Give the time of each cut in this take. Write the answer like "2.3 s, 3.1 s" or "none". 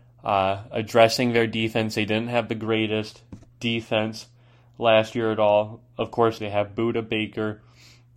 6.4 s